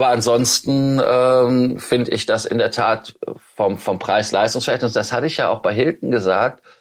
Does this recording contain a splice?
no; 0 cuts

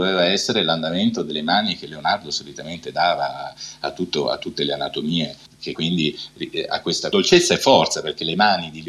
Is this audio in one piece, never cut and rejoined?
no; 1 cut; at 5.7 s

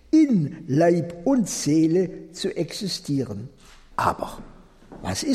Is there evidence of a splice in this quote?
yes; 1 cut; at 3.9 s

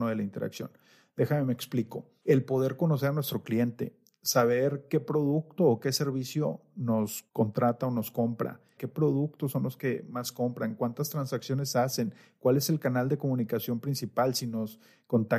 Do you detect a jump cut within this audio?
yes; 1 cut; at 8.8 s

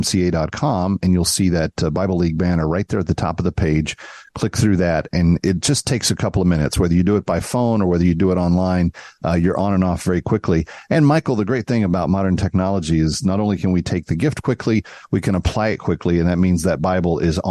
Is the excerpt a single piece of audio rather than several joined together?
yes; 0 cuts

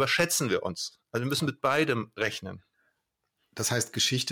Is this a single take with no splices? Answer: yes; 0 cuts

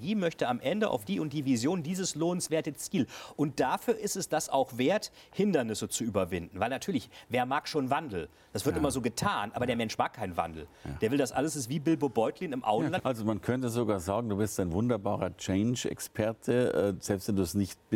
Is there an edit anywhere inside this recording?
yes; 1 cut; at 13.0 s

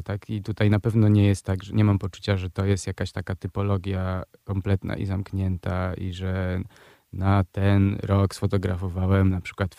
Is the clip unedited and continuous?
yes; 0 cuts

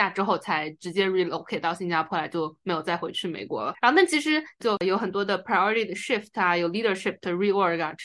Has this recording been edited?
yes; 1 cut; at 4.6 s

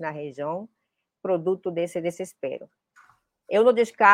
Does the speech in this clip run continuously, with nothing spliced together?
yes; 0 cuts

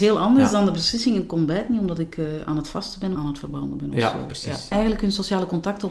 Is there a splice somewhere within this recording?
yes; 2 cuts; at 3.2 s, 4.7 s

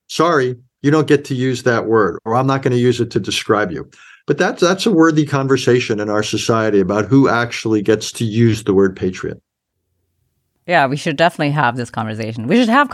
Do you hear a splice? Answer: no; 0 cuts

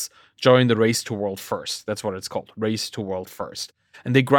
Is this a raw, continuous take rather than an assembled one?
yes; 0 cuts

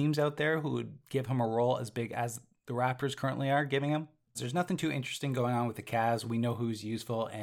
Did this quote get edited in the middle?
yes; 1 cut; at 4.3 s

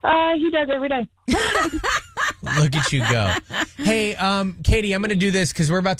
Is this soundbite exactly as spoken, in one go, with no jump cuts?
yes; 0 cuts

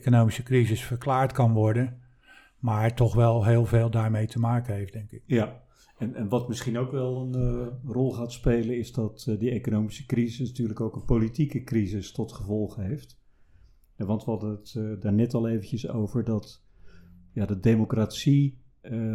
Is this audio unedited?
yes; 0 cuts

